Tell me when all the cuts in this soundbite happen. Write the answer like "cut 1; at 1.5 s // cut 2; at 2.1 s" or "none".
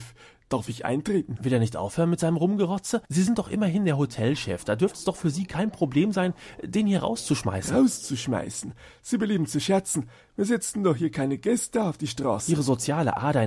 cut 1; at 1.4 s // cut 2; at 3.1 s